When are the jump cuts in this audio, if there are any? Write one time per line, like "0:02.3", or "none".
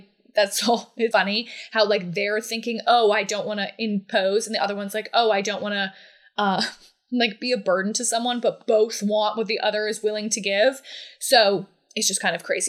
0:01.1